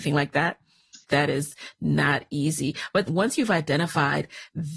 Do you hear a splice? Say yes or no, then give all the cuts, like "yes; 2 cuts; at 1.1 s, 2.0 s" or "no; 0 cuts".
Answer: yes; 2 cuts; at 1.0 s, 3.1 s